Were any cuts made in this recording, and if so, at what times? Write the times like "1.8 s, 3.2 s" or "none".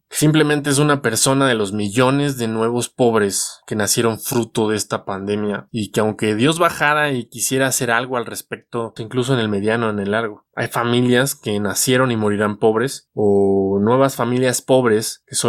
9.0 s

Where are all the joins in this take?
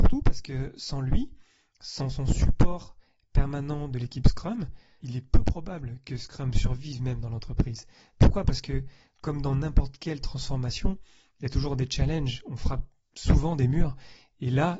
5.0 s

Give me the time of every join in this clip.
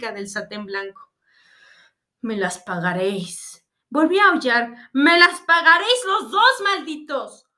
none

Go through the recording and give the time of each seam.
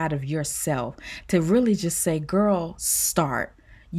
none

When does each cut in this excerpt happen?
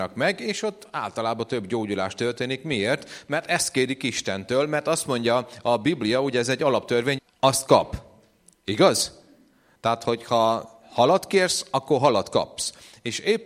7.2 s

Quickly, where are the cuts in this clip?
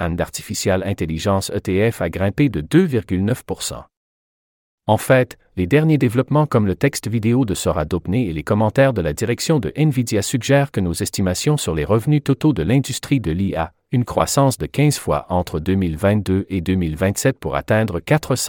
4.7 s

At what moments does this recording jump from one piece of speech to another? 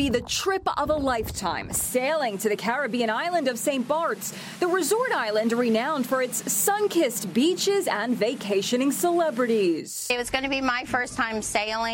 none

